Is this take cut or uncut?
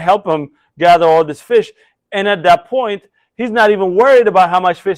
uncut